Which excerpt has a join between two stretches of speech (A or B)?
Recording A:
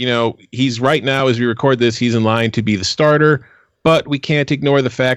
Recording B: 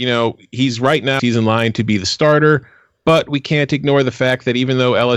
B